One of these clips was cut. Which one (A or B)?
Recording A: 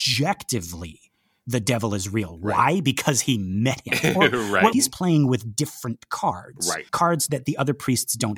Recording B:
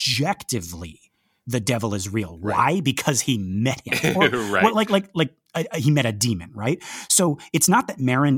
A